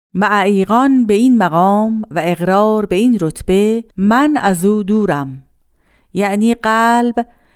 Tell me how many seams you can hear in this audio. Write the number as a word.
one